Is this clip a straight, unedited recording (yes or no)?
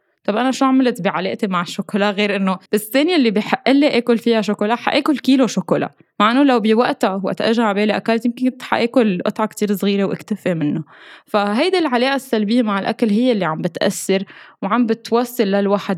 no